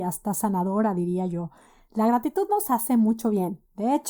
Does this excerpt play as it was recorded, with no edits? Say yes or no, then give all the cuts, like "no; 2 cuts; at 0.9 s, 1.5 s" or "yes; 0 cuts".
yes; 0 cuts